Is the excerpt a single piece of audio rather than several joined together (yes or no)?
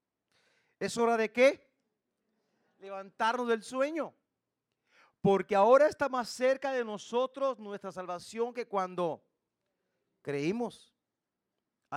yes